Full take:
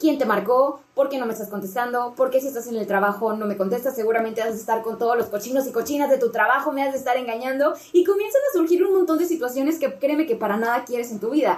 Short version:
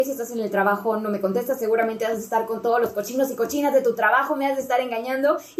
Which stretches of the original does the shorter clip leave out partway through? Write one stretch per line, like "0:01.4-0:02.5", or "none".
none